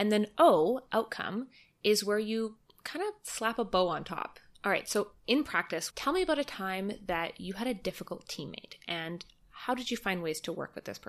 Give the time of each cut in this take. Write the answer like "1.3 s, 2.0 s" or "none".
4.5 s, 5.9 s